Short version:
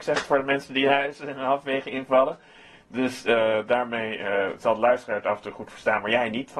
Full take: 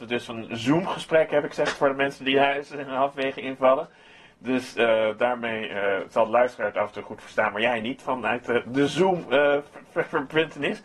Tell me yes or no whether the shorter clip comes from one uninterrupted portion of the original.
yes